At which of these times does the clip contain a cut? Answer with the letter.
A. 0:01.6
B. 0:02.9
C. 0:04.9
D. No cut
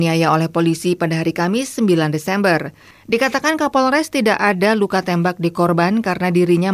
B